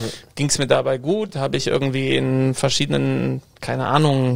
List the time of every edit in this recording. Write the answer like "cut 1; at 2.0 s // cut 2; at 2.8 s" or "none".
none

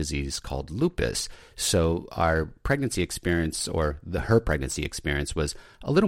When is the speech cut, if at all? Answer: none

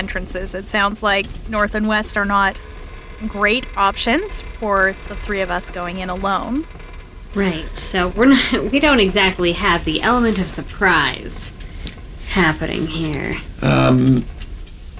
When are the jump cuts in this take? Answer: cut 1; at 7.3 s

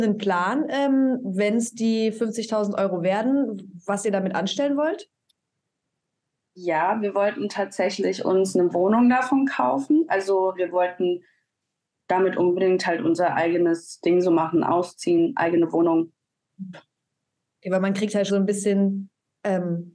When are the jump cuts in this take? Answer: cut 1; at 16.7 s // cut 2; at 18.3 s

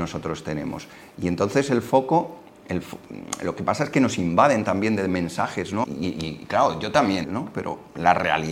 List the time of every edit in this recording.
cut 1; at 5.8 s // cut 2; at 7.2 s

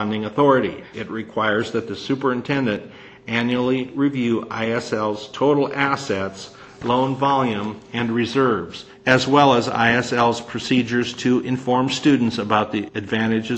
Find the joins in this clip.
cut 1; at 0.9 s

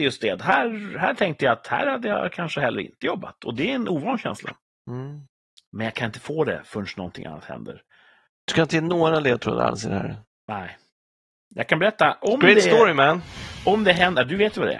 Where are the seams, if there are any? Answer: cut 1; at 5.6 s // cut 2; at 8.3 s

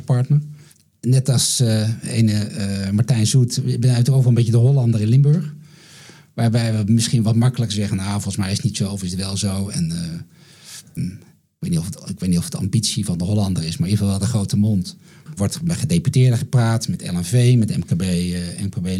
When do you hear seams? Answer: cut 1; at 11.0 s // cut 2; at 15.3 s

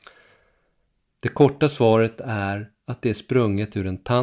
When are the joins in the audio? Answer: cut 1; at 1.1 s

